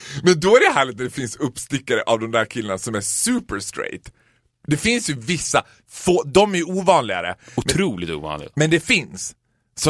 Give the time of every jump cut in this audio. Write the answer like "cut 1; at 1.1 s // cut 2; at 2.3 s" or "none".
none